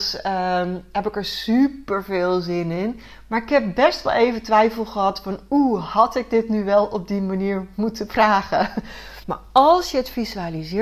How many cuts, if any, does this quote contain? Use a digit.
1